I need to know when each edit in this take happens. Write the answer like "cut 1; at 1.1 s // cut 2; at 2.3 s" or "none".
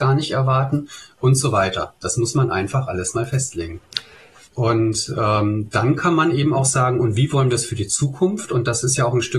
cut 1; at 4.5 s